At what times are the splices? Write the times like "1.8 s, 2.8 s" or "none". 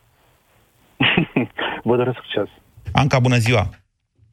2.8 s